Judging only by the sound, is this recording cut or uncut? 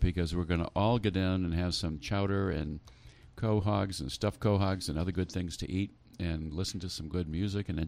uncut